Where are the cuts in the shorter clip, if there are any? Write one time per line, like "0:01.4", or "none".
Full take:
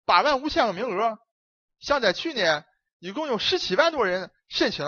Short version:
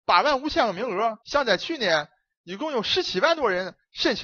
0:01.2

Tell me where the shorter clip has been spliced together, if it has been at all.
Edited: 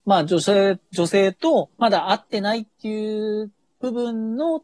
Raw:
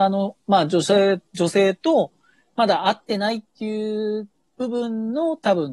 0:01.8

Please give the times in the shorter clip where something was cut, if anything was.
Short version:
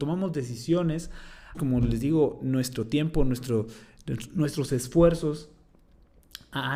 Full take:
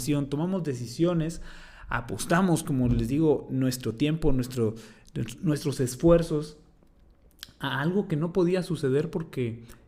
0:01.5

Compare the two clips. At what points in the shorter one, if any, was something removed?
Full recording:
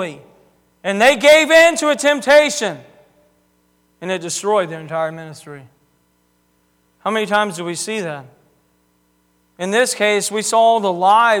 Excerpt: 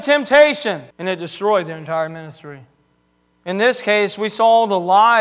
0:00.9
0:03.3

